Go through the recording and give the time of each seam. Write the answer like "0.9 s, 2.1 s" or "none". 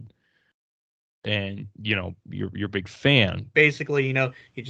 3.5 s